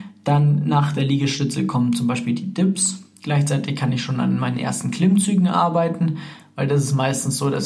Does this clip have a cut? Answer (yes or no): no